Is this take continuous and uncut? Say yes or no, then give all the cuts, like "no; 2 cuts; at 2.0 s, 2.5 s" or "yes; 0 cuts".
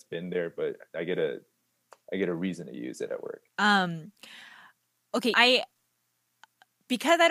no; 2 cuts; at 3.5 s, 5.3 s